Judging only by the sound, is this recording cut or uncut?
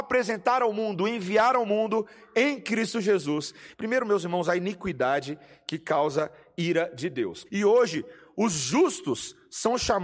cut